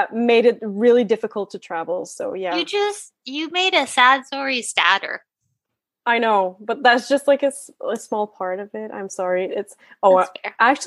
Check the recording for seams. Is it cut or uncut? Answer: uncut